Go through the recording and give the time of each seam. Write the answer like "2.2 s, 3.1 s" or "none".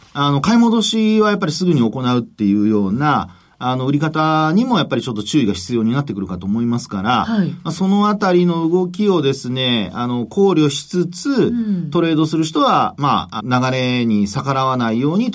13.4 s